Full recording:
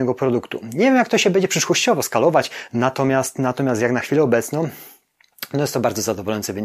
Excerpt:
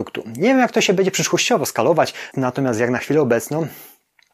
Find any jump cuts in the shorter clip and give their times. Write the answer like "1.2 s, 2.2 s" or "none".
2.3 s